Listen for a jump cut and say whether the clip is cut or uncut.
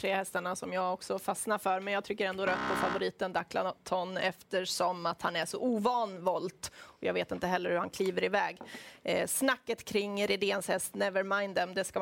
uncut